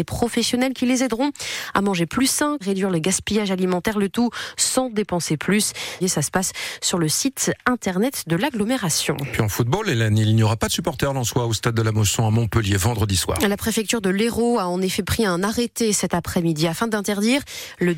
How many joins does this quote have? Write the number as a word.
two